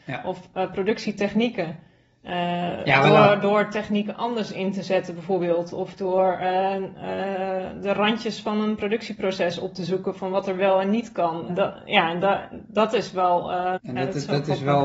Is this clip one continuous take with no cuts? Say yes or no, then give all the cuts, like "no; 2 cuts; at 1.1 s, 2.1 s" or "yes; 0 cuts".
no; 2 cuts; at 11.5 s, 13.8 s